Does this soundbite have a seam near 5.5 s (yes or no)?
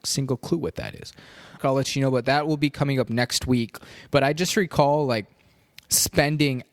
no